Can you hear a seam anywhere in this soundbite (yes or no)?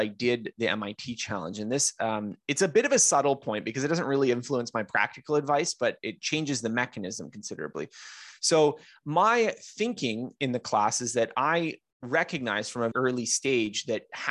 yes